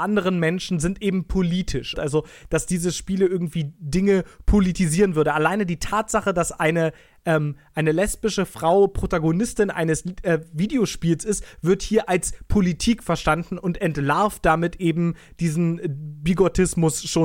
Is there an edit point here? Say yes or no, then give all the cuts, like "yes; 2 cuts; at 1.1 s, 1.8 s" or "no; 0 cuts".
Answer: yes; 1 cut; at 1.9 s